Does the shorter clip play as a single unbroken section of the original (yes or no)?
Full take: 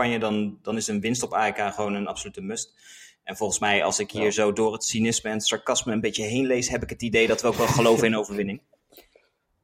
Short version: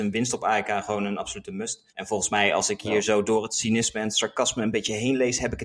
no